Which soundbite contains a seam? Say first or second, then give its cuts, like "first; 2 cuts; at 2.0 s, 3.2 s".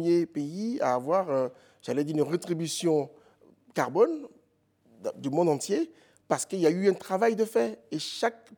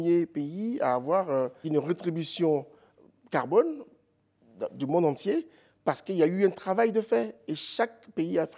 second; 1 cut; at 1.6 s